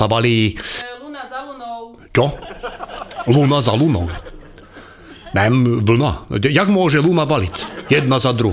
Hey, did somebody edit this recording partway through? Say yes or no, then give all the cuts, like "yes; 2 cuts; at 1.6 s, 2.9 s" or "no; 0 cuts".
no; 0 cuts